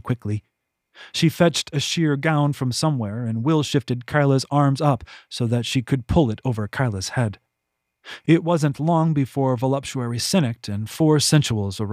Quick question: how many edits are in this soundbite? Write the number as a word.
one